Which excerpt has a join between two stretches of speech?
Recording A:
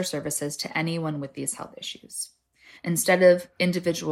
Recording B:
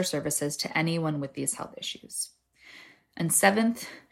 A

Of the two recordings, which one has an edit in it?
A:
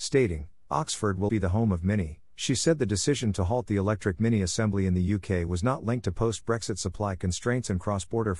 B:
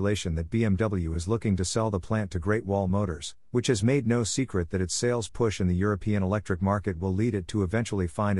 A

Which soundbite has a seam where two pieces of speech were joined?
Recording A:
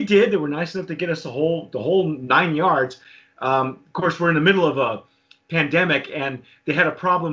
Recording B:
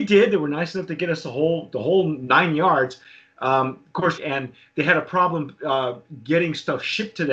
B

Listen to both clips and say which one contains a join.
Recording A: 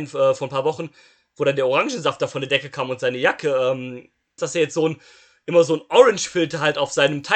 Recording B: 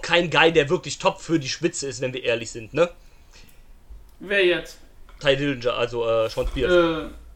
A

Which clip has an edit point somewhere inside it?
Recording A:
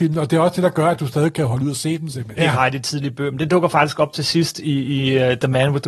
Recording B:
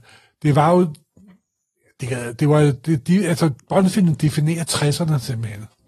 A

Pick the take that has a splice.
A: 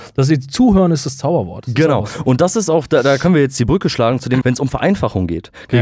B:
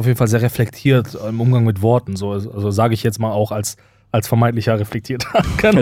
A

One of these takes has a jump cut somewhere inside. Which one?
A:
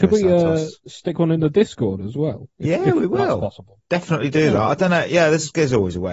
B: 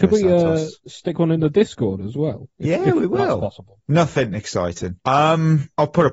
B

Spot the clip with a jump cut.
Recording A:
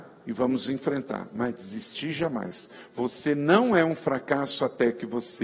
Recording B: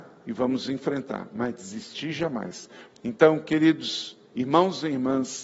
B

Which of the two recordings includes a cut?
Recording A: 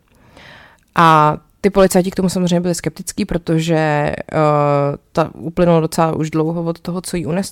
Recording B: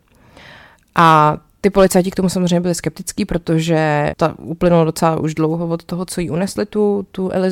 B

